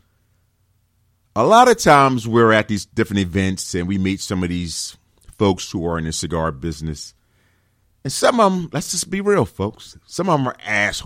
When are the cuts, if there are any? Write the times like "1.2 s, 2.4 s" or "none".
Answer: none